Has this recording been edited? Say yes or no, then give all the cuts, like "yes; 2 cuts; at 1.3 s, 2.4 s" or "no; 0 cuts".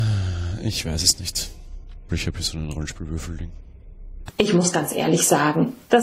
yes; 2 cuts; at 2.1 s, 4.3 s